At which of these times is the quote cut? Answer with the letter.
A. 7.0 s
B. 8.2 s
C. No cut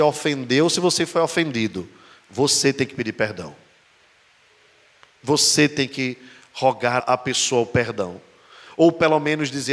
A